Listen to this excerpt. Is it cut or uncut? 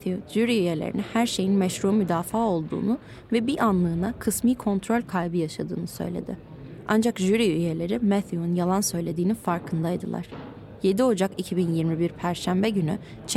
uncut